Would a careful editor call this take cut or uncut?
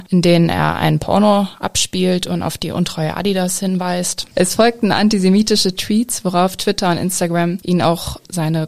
uncut